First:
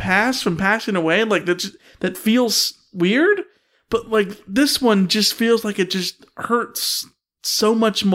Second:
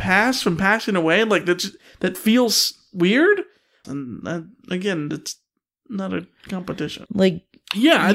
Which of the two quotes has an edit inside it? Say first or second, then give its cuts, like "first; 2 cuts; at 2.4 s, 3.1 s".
second; 2 cuts; at 3.8 s, 7.1 s